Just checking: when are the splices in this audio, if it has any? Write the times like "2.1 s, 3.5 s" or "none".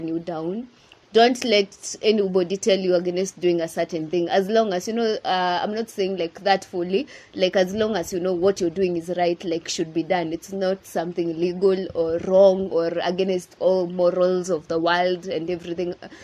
none